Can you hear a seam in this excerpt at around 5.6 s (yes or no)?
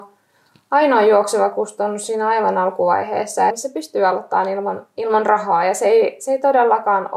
no